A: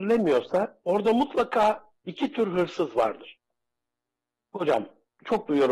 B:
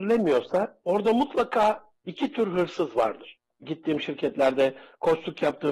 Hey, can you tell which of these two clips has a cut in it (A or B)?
B